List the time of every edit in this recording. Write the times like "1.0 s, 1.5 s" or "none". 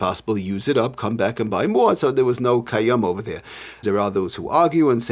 3.8 s